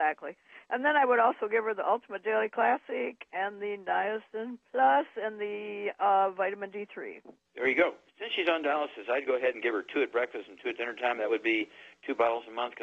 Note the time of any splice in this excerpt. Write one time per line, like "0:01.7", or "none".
0:08.1